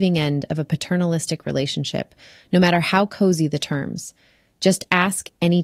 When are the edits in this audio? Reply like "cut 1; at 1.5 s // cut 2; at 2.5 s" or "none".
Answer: none